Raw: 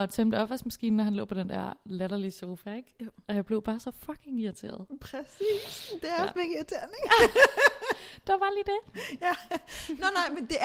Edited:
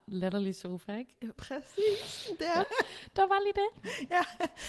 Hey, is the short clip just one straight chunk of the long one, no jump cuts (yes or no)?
no